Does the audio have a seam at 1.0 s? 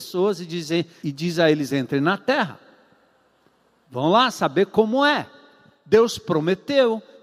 yes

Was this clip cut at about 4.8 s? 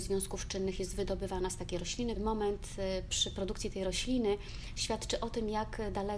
no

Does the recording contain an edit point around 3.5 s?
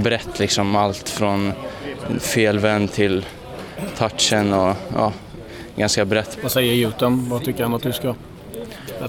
no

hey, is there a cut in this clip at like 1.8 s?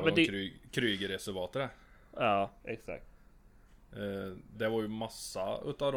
no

